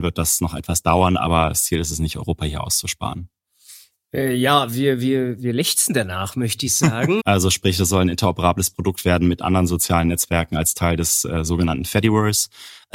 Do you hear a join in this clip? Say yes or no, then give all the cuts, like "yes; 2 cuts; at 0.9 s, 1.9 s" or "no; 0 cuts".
yes; 1 cut; at 7.2 s